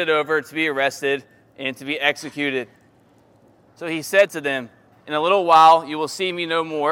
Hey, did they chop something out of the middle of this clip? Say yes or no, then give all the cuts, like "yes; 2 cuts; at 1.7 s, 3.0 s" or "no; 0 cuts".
yes; 2 cuts; at 3.7 s, 4.9 s